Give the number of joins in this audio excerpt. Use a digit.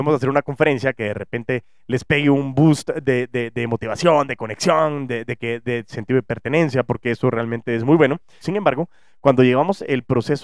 1